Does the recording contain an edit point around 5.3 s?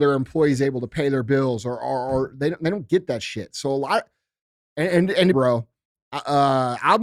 yes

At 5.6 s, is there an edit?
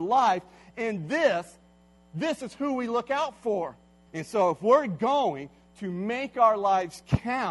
no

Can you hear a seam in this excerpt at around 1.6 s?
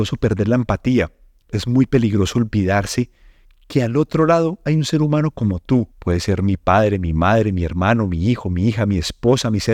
no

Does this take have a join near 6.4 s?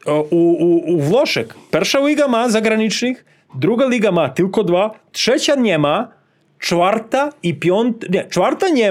no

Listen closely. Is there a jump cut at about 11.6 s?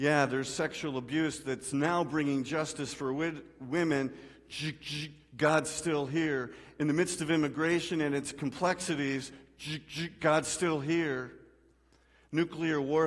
no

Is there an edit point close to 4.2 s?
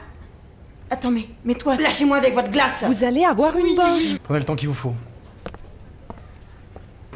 yes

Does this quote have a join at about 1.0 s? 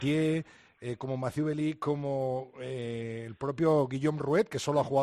no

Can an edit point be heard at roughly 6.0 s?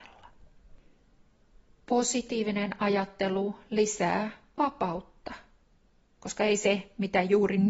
yes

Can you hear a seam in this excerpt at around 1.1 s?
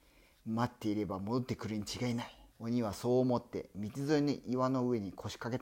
no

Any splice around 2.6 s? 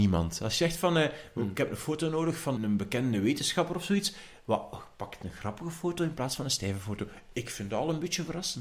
yes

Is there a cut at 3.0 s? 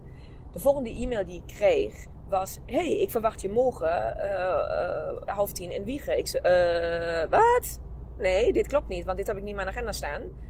no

